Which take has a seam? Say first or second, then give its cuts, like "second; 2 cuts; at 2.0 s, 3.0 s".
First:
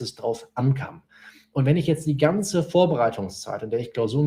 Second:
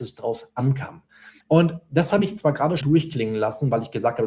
second; 2 cuts; at 1.4 s, 2.8 s